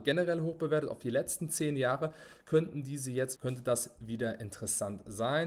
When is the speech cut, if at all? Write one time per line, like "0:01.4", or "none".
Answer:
0:03.4